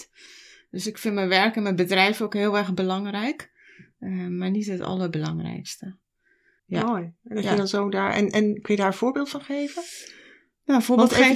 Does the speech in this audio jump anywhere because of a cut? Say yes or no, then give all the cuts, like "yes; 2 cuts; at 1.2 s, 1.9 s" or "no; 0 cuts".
yes; 1 cut; at 6.6 s